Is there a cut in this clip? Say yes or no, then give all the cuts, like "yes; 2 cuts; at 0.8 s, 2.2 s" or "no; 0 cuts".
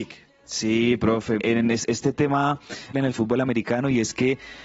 yes; 2 cuts; at 1.4 s, 2.9 s